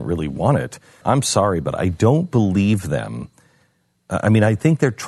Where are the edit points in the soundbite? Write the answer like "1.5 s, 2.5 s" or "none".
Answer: 1.0 s